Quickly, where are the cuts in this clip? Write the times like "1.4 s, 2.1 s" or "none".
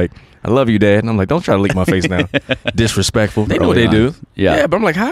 3.5 s